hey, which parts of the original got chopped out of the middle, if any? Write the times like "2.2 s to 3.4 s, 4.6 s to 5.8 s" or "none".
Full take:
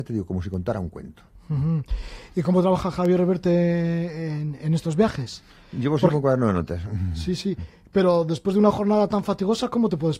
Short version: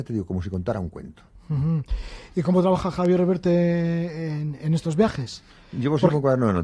none

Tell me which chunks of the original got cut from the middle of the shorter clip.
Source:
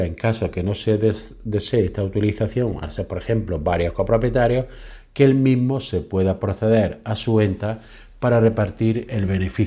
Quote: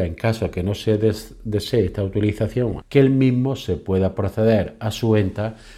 2.8 s to 5.0 s

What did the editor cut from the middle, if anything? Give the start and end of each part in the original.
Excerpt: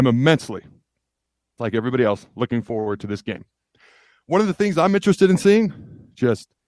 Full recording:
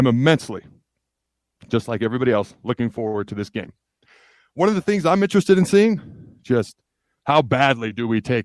1.6 s to 1.9 s

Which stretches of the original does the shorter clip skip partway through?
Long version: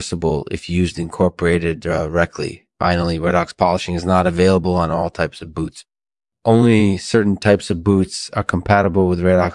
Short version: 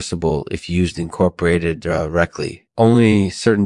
2.7 s to 6.4 s

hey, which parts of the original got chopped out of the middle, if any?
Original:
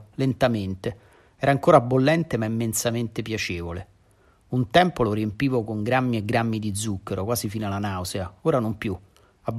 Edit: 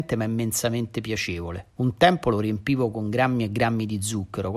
3.9 s to 4.4 s

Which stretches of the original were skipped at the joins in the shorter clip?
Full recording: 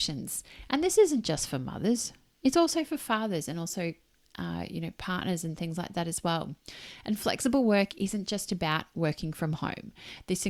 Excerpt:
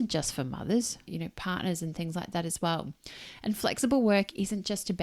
2.2 s to 4.7 s

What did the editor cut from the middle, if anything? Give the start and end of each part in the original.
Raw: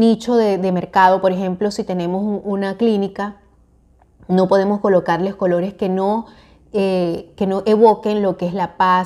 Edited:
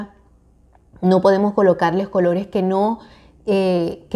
none

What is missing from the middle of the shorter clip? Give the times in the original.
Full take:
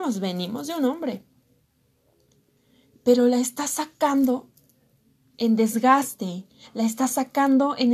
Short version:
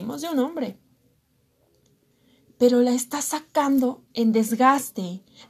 4.5 s to 5.3 s

